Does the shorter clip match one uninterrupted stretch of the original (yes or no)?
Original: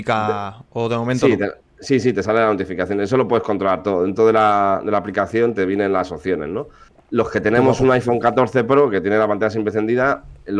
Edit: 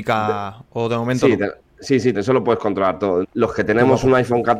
no